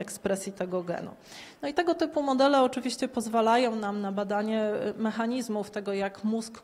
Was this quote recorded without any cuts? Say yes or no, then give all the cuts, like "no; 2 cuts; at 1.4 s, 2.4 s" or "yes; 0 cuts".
yes; 0 cuts